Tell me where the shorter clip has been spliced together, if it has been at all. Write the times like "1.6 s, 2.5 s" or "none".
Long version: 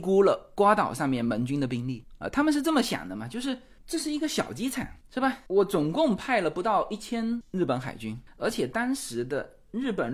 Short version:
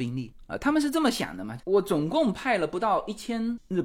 1.6 s